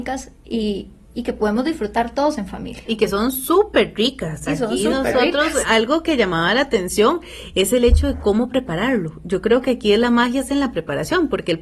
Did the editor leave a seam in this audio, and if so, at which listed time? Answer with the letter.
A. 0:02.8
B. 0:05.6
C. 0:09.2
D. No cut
B